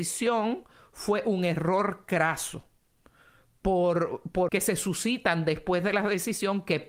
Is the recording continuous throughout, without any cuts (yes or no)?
no